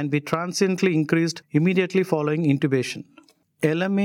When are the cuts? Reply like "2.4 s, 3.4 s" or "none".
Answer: none